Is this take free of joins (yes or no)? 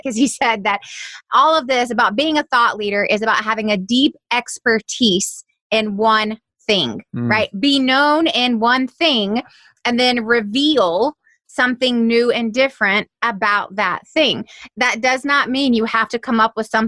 yes